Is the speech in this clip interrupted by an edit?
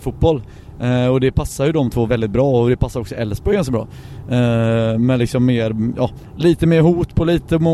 yes; 1 cut; at 2.1 s

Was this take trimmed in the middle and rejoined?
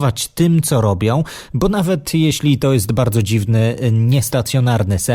no; 0 cuts

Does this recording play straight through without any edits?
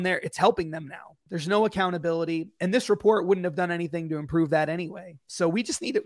no; 1 cut; at 1.3 s

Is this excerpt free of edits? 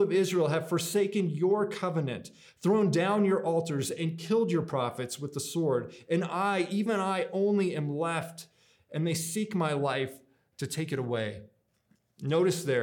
yes; 0 cuts

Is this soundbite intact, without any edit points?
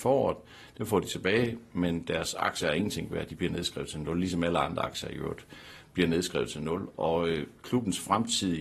yes; 0 cuts

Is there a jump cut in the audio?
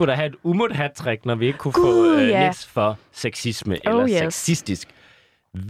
yes; 1 cut; at 2.5 s

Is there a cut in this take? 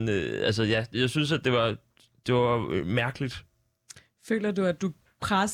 yes; 1 cut; at 0.9 s

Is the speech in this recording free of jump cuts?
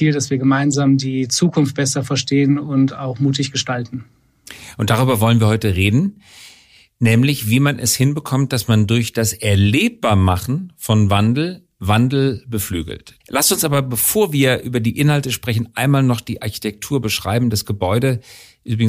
no; 1 cut; at 13.2 s

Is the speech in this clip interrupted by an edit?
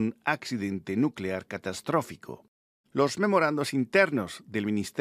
yes; 1 cut; at 2.8 s

